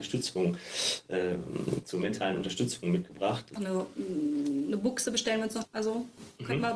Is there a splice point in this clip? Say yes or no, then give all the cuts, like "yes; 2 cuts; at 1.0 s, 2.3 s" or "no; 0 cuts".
yes; 2 cuts; at 3.6 s, 5.6 s